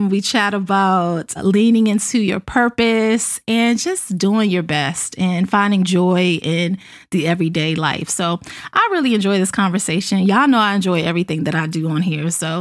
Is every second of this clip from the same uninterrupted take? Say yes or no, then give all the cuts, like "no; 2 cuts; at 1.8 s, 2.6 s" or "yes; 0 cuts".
yes; 0 cuts